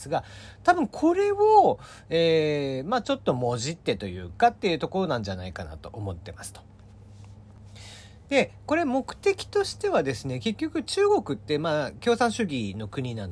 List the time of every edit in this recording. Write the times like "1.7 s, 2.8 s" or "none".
none